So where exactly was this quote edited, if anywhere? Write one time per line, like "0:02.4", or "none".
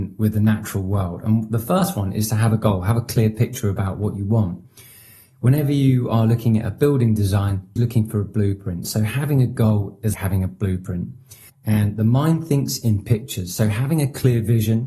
0:07.8
0:10.1
0:11.5